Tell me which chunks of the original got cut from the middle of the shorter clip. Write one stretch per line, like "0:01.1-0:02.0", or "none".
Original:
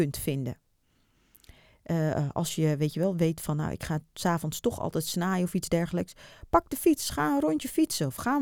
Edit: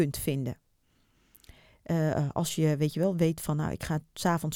none